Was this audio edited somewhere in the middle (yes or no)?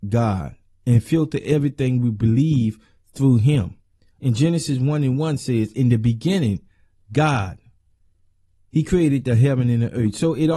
no